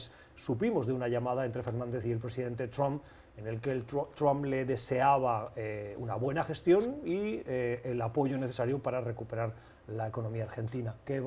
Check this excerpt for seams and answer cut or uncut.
uncut